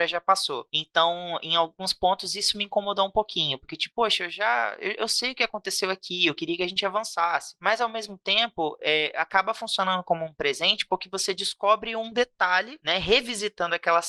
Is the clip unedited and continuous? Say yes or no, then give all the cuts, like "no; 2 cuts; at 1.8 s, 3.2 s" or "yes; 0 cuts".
no; 1 cut; at 3.9 s